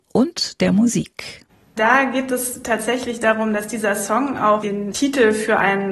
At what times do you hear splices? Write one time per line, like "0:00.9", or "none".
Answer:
none